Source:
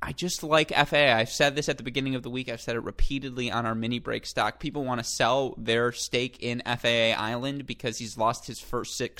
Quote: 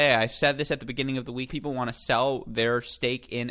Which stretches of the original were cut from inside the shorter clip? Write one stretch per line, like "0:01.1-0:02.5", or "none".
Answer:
0:02.4-0:04.6